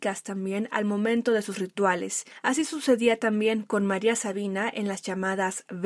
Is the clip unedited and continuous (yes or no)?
yes